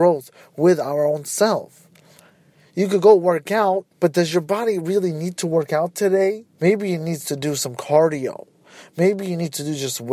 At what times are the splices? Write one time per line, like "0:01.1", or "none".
0:03.9
0:06.6